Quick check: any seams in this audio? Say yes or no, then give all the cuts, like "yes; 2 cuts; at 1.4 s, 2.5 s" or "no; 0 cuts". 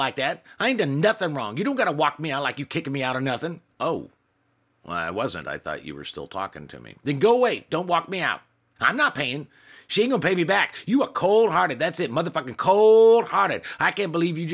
yes; 1 cut; at 8.8 s